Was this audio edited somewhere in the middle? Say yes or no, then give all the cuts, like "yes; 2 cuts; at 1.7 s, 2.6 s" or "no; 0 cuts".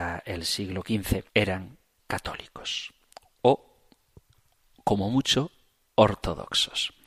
yes; 1 cut; at 1.3 s